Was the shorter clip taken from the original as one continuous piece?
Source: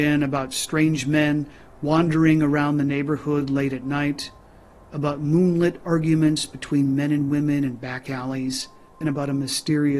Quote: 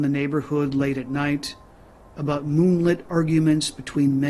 yes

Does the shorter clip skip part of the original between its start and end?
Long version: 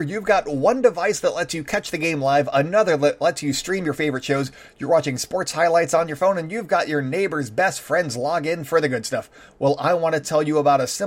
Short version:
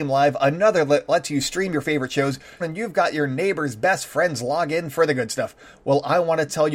yes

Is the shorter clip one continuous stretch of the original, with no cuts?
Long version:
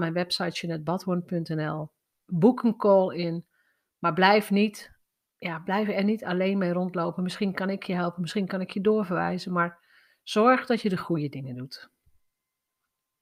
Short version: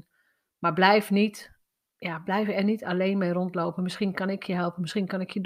yes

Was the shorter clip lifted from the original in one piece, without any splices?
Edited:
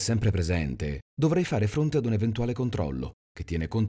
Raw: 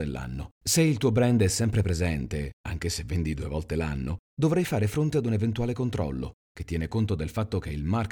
no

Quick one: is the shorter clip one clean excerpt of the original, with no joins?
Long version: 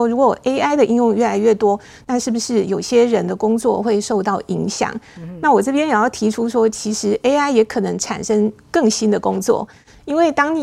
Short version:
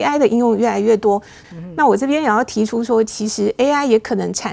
no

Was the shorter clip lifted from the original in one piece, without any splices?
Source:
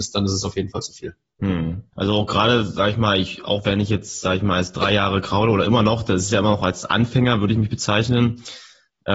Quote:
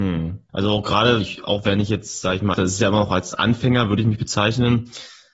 no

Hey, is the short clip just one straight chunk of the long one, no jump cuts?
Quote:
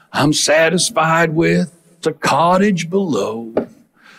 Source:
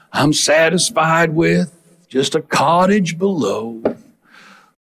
no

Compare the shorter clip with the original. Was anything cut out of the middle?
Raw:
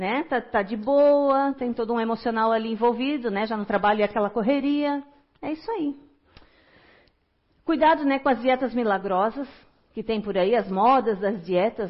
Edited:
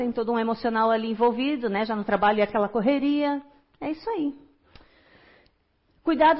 no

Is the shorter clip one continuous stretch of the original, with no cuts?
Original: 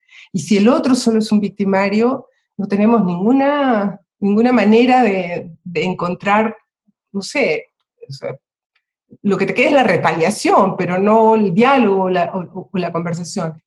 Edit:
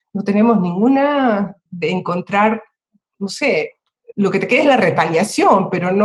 no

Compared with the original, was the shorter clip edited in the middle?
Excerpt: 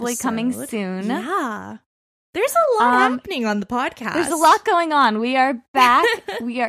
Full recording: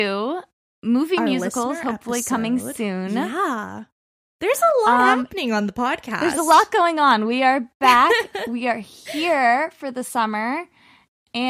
no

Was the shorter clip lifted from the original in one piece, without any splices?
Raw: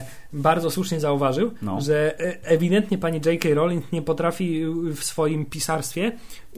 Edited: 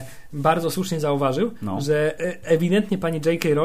yes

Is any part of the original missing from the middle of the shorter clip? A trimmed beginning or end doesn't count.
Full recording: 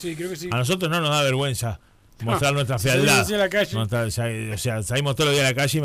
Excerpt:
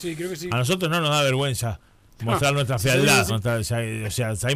yes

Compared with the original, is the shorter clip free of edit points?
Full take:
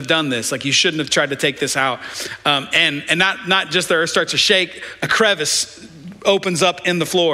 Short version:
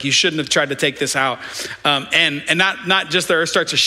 yes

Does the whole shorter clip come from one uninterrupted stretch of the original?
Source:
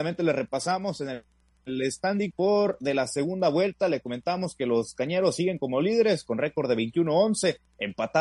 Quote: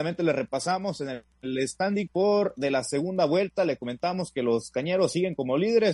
no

